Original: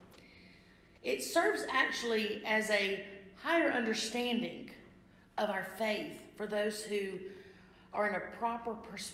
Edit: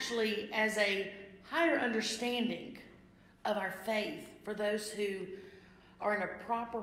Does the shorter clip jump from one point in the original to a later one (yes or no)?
no